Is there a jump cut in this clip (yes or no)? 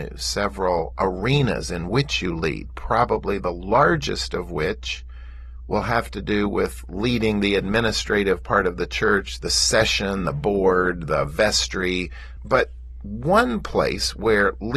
yes